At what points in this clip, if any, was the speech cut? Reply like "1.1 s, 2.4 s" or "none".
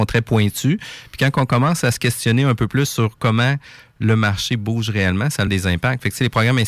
5.5 s